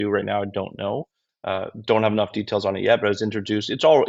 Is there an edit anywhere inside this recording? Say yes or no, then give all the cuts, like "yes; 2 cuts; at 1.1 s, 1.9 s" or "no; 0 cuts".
yes; 1 cut; at 1.3 s